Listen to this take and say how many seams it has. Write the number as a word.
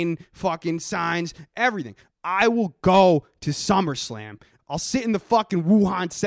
two